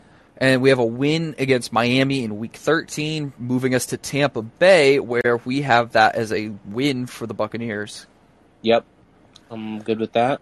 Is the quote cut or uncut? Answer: uncut